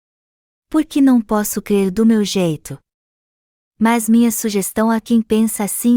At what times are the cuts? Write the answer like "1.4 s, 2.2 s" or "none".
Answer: none